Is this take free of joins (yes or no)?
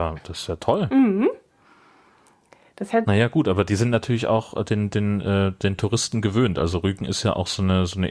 yes